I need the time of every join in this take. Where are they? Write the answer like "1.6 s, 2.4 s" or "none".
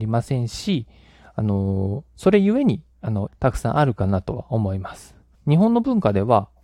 3.3 s, 5.3 s

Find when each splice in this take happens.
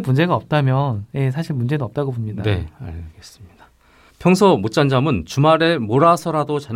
4.1 s

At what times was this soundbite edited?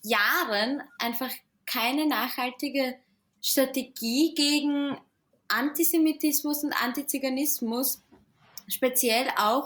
none

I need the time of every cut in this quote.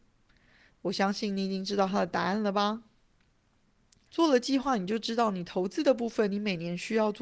4.1 s

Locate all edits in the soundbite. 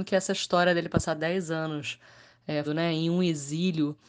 2.6 s

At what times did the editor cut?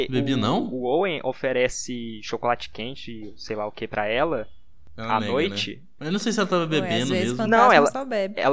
6.0 s

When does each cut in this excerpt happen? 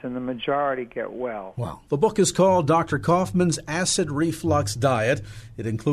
1.9 s

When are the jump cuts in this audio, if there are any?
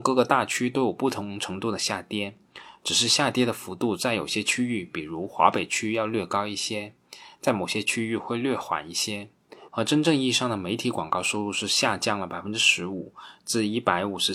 9.7 s

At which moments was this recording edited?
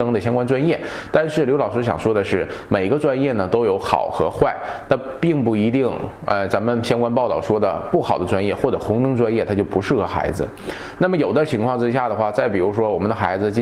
none

